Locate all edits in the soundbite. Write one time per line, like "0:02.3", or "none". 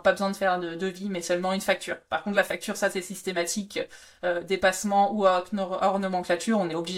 none